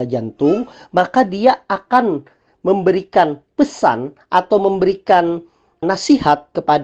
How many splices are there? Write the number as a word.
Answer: one